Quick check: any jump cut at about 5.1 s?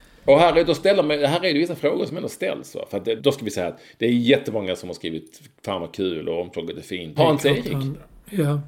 no; 2 cuts; at 3.2 s, 7.2 s

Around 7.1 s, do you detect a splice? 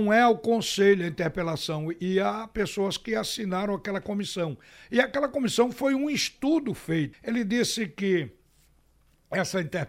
yes; 1 cut; at 7.1 s

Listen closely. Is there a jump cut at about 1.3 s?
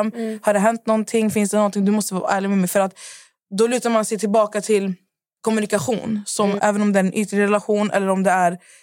no; 1 cut; at 6.6 s

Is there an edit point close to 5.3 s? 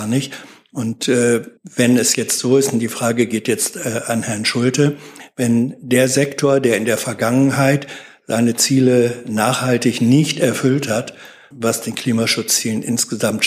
no; 2 cuts; at 1.6 s, 11.5 s

